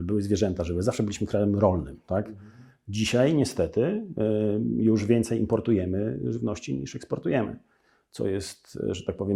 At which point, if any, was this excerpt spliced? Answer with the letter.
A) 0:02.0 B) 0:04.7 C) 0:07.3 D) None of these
D